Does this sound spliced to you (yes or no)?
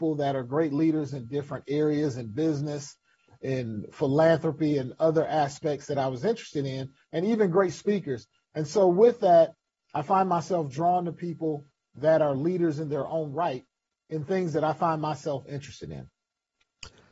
no